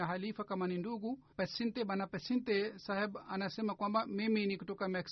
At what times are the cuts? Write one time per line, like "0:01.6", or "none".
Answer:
0:01.3